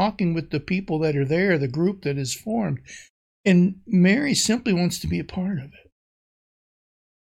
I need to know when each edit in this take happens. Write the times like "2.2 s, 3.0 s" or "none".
none